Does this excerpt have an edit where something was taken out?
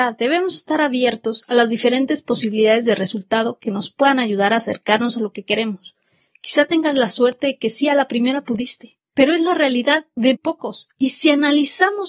yes; 1 cut; at 10.3 s

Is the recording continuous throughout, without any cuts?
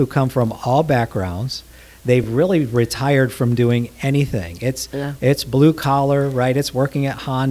yes; 0 cuts

